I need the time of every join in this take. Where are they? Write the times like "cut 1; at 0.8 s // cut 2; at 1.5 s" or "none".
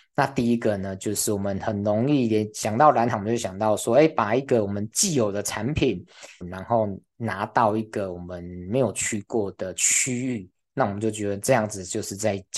cut 1; at 6.4 s // cut 2; at 10.7 s